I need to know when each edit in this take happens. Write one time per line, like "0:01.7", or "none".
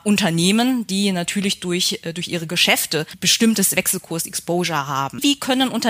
none